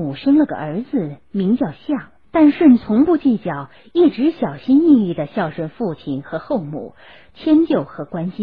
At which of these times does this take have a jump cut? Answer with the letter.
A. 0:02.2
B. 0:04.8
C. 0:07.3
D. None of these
A